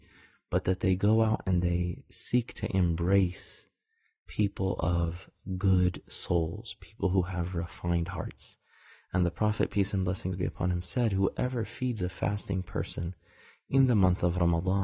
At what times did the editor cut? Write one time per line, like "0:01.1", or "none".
none